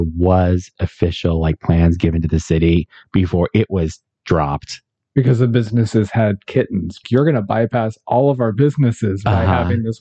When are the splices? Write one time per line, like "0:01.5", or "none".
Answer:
0:07.0

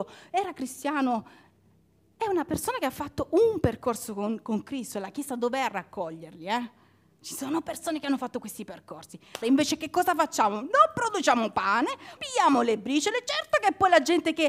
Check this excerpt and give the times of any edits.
0:09.4
0:12.2

